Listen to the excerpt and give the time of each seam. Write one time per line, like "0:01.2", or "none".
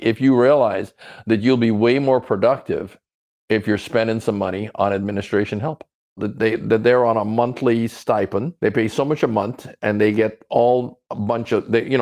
0:06.2
0:08.6